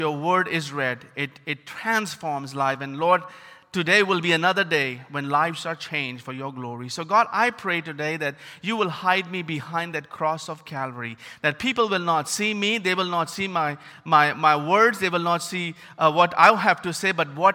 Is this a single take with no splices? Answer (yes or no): yes